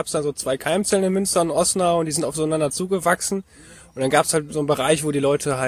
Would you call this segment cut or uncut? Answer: uncut